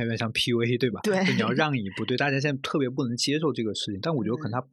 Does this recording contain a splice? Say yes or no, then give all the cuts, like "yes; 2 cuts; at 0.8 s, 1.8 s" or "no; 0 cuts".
no; 0 cuts